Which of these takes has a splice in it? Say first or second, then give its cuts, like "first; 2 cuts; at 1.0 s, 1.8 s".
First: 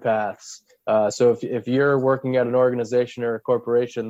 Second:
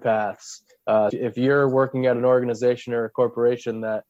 second; 1 cut; at 1.1 s